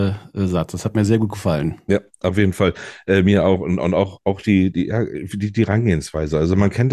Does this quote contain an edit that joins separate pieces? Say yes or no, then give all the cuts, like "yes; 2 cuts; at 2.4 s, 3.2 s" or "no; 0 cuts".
no; 0 cuts